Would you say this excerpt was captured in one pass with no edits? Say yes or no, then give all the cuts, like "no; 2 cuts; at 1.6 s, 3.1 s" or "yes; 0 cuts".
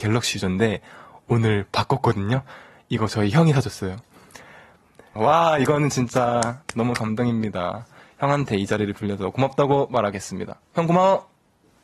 no; 1 cut; at 5.2 s